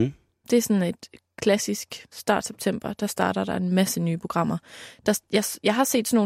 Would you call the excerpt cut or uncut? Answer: cut